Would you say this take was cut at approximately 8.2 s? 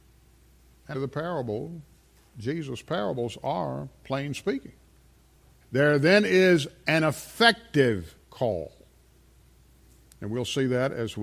yes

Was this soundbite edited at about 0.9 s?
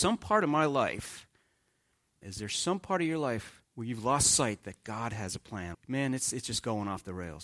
no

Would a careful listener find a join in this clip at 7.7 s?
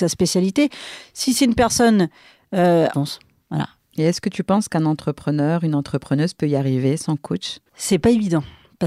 yes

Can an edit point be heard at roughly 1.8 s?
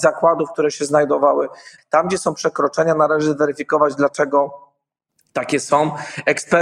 yes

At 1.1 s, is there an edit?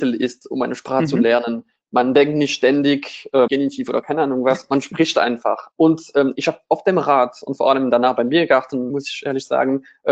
no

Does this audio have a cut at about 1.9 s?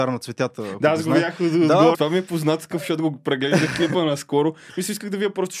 yes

